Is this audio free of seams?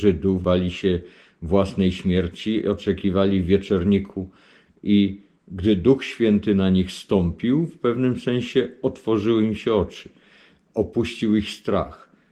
yes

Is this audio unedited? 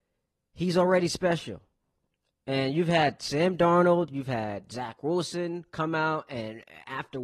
yes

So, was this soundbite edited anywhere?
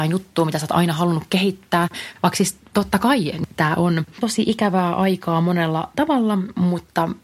yes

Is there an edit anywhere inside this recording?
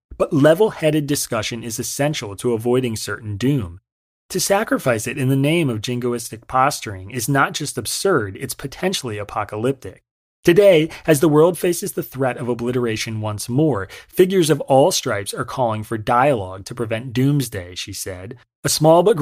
no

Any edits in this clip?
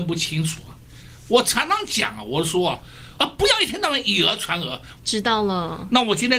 yes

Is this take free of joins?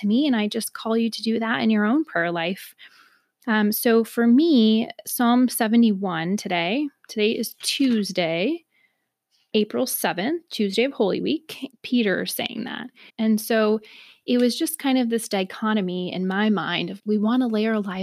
no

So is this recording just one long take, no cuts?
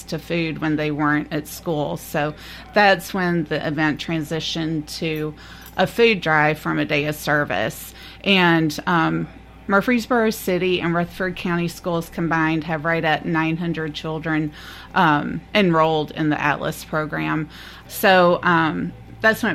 no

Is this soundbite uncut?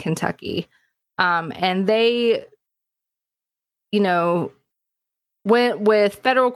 yes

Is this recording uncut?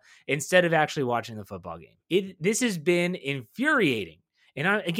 no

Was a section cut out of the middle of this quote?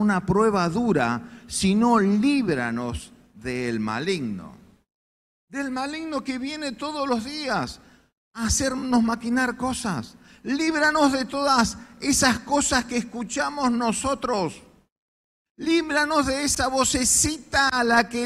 no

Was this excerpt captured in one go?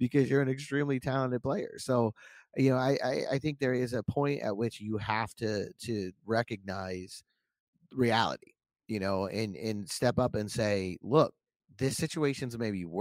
yes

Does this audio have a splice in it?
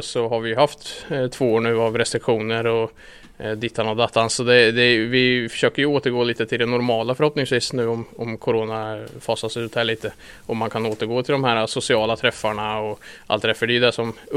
no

